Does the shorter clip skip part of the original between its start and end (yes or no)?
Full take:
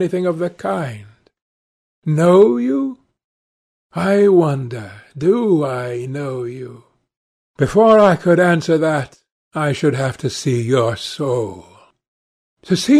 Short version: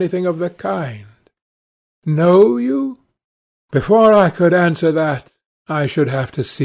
yes